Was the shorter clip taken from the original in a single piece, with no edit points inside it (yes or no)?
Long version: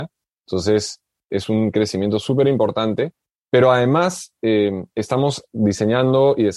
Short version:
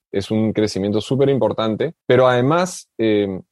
no